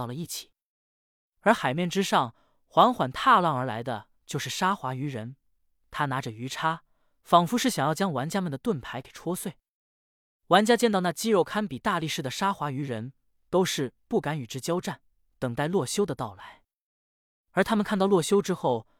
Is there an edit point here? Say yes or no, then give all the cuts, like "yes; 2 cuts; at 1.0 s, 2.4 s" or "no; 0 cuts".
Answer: no; 0 cuts